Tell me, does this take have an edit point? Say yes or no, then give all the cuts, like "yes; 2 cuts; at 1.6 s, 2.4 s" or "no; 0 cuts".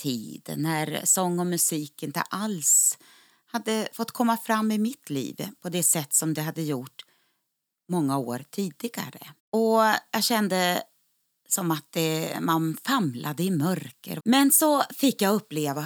yes; 2 cuts; at 9.4 s, 14.2 s